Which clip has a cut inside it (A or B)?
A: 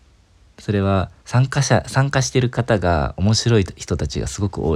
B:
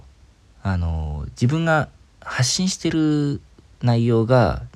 A